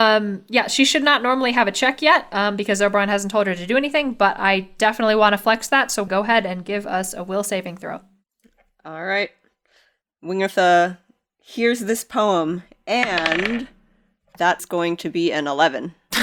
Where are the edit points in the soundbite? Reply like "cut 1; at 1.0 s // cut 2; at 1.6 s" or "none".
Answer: cut 1; at 6.1 s